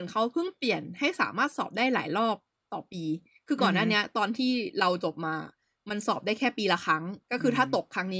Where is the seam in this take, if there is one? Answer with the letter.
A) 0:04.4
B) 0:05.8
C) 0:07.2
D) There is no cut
C